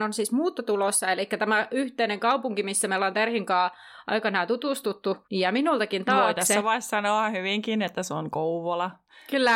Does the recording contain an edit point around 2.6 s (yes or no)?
no